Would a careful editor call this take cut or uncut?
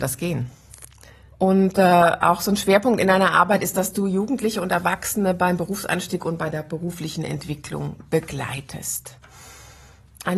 cut